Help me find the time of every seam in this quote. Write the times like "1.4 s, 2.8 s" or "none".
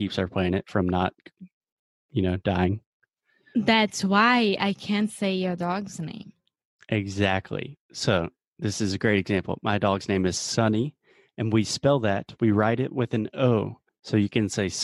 13.9 s